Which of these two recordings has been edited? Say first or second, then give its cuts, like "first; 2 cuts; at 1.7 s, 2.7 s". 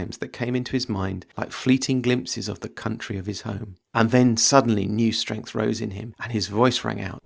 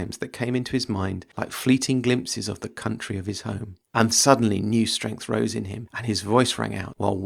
second; 1 cut; at 4.1 s